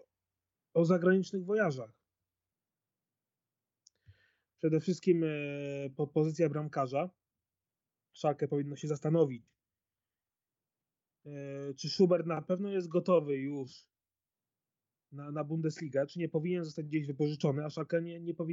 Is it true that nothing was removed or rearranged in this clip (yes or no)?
yes